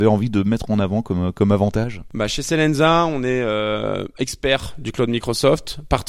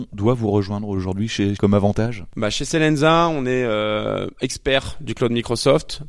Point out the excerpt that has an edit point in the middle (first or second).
second